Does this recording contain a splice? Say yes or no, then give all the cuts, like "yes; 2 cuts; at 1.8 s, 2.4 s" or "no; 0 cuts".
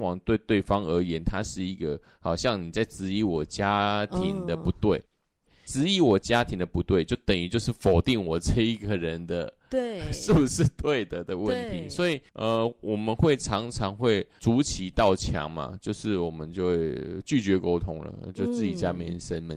yes; 1 cut; at 12.3 s